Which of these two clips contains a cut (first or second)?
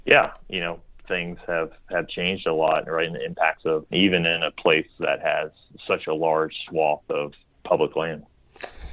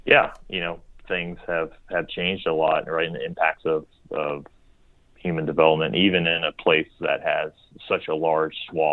first